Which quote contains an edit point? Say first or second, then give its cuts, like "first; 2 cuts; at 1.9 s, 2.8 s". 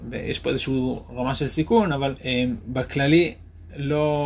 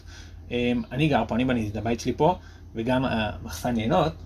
first; 1 cut; at 2.2 s